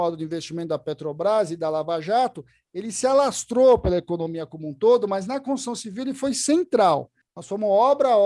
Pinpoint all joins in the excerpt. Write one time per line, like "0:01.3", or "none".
0:07.2